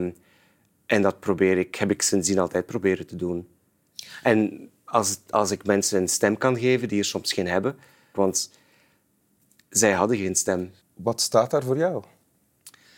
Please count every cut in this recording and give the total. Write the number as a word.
two